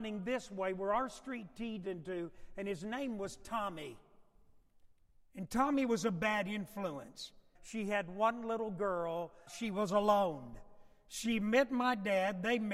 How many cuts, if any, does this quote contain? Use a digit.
2